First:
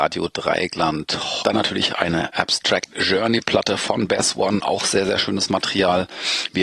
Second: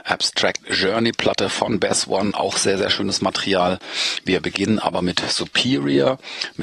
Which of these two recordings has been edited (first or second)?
first